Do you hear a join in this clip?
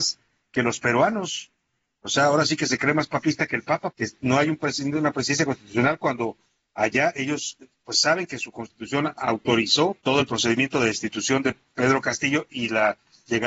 yes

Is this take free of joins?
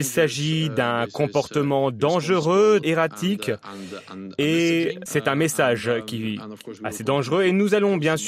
no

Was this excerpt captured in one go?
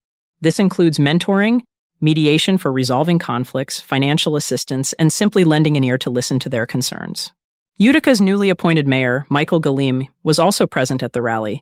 no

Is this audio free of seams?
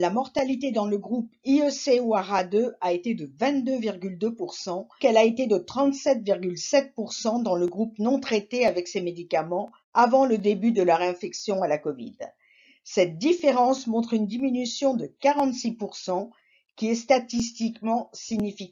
no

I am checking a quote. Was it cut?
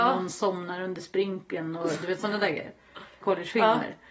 yes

